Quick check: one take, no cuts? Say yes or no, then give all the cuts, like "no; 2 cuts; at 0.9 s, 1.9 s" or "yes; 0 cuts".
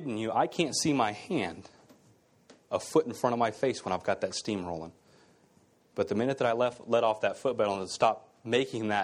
yes; 0 cuts